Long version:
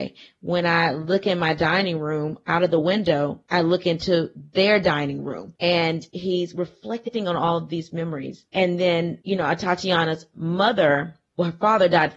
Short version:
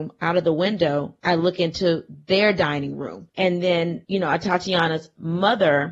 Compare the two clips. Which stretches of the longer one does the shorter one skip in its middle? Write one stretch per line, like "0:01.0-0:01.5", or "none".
0:05.6-0:08.5